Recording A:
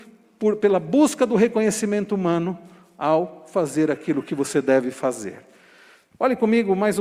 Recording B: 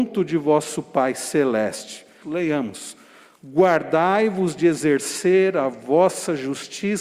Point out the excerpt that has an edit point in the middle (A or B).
B